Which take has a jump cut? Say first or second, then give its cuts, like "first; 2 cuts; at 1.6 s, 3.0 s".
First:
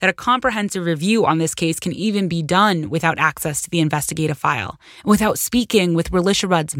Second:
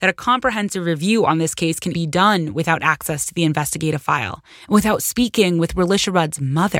second; 1 cut; at 1.9 s